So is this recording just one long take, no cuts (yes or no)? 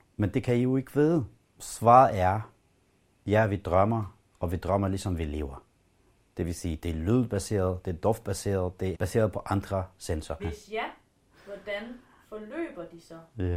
no